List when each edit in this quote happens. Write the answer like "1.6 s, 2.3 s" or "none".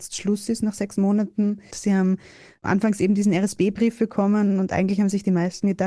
1.7 s